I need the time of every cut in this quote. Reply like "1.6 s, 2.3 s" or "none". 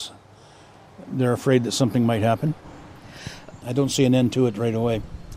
3.6 s